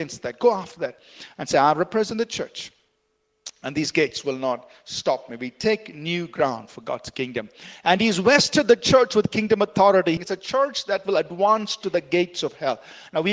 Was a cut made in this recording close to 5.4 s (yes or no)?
no